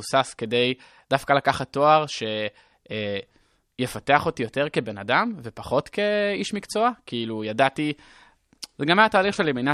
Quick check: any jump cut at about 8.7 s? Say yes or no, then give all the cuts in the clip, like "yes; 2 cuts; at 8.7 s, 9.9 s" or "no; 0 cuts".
no; 0 cuts